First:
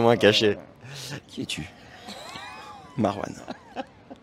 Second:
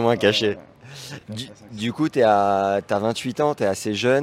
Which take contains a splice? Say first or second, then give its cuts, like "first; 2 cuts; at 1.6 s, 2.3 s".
first; 1 cut; at 1.2 s